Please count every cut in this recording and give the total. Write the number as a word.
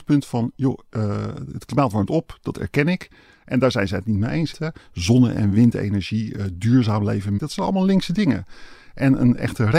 three